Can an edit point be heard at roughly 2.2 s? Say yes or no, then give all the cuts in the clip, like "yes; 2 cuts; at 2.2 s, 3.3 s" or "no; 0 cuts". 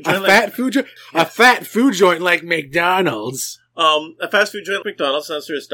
no; 2 cuts; at 1.0 s, 4.8 s